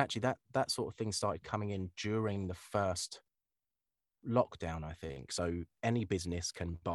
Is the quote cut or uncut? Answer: cut